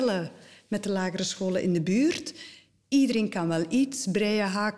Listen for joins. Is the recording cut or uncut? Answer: uncut